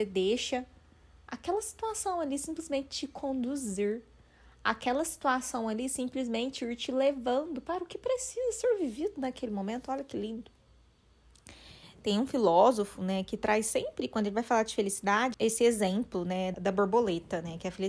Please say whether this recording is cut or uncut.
cut